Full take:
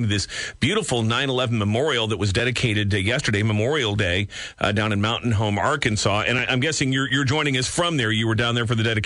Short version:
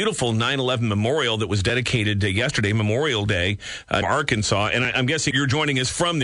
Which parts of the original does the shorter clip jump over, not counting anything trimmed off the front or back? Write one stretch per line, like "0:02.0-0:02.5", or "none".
0:04.7-0:05.6
0:06.8-0:07.1